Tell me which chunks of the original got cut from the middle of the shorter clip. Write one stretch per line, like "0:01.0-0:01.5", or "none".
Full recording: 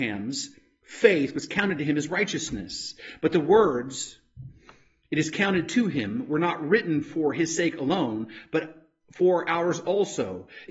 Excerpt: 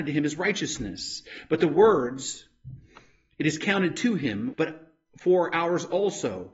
0:06.3-0:08.5